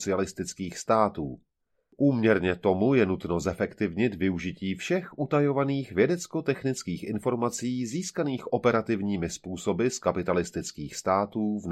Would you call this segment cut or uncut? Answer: uncut